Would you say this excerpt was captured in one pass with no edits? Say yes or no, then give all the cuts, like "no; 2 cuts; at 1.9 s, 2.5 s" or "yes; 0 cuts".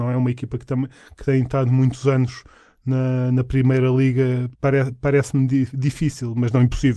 no; 1 cut; at 4.6 s